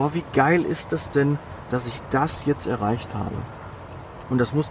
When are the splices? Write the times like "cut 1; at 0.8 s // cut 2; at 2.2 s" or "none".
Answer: none